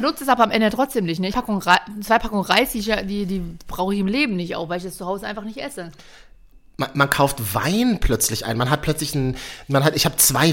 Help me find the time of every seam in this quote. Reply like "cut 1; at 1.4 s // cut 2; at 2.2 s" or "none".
cut 1; at 1.3 s